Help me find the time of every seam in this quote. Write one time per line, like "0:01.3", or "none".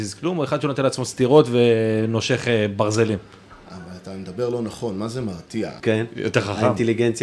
0:05.8